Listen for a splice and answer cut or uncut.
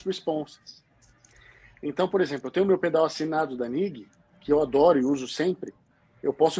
uncut